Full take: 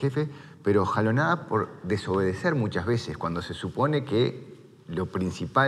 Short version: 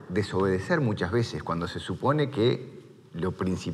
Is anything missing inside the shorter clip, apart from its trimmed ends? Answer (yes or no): no